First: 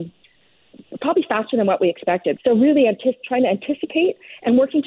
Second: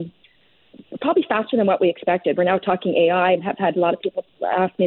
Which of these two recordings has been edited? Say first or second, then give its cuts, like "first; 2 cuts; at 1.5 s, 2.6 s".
first; 1 cut; at 2.4 s